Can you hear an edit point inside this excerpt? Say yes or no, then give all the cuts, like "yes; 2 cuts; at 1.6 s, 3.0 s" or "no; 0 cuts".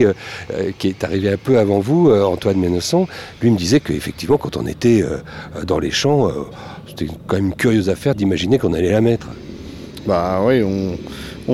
no; 0 cuts